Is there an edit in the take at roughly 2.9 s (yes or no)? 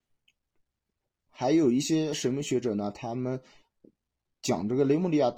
no